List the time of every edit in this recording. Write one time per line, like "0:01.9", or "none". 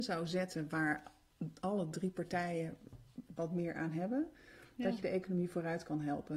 none